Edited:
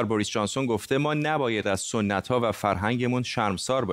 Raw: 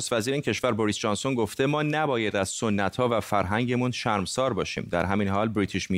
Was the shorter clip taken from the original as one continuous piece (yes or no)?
yes